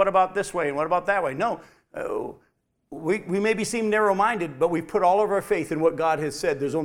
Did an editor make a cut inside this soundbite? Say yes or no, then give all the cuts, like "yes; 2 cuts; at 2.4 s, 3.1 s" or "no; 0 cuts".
no; 0 cuts